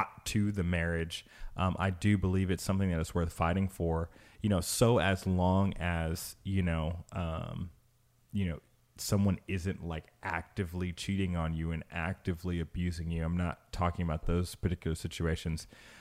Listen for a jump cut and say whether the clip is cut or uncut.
uncut